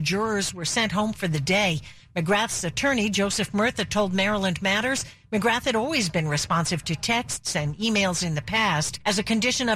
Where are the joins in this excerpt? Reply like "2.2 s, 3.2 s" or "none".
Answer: none